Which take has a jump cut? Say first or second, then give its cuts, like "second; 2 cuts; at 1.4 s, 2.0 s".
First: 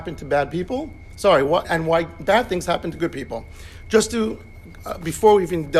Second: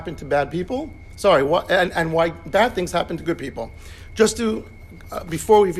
first; 1 cut; at 1.6 s